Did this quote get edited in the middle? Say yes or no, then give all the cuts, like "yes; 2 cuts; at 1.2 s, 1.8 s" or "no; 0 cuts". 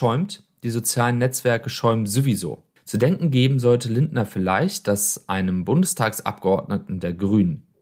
yes; 1 cut; at 2.8 s